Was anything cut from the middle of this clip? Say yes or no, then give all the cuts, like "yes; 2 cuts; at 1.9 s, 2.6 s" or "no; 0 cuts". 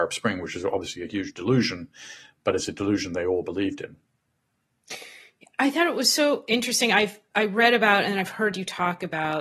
no; 0 cuts